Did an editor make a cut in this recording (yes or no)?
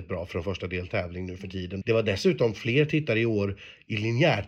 yes